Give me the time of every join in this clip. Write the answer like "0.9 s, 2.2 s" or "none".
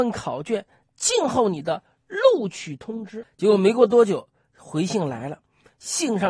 3.2 s